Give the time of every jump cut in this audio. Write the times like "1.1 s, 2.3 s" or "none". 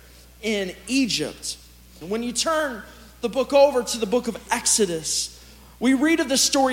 2.0 s